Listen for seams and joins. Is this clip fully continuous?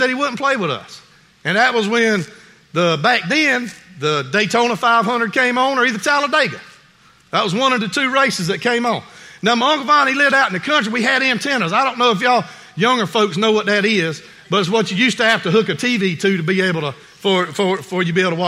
yes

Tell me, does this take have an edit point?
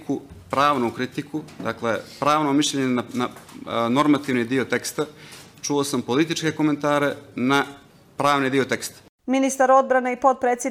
no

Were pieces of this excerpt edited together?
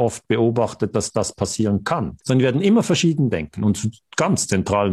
yes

